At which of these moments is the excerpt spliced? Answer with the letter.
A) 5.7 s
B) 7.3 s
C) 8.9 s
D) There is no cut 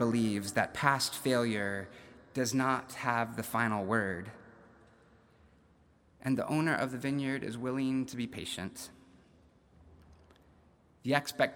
D